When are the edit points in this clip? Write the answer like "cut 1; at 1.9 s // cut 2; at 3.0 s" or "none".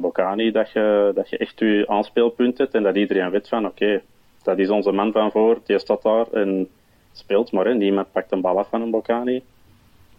none